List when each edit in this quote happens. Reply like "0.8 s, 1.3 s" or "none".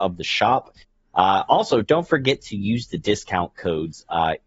none